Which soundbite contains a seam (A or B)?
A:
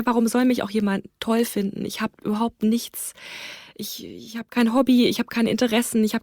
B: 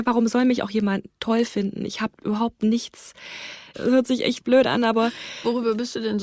B